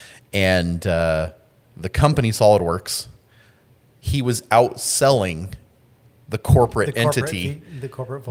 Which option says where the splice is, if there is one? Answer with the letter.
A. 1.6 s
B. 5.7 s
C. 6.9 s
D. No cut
D